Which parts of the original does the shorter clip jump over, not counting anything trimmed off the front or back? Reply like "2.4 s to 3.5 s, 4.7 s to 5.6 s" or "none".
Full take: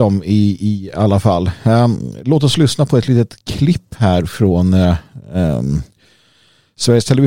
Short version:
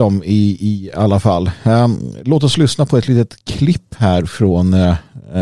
none